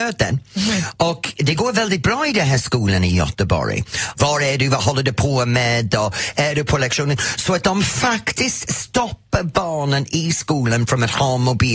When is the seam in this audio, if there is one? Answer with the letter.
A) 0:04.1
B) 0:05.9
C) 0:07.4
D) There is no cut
A